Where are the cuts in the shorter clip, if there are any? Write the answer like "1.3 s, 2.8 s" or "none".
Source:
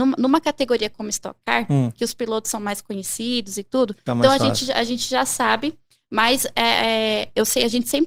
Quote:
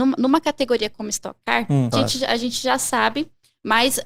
1.9 s